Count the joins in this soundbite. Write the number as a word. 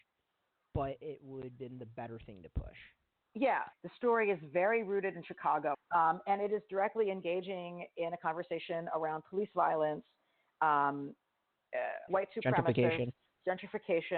three